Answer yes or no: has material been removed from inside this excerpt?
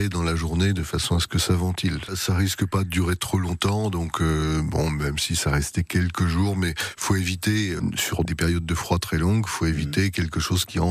no